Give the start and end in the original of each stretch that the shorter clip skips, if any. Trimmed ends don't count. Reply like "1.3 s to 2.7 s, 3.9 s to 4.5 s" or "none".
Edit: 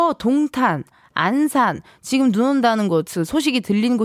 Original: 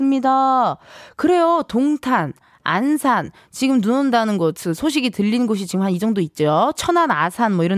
none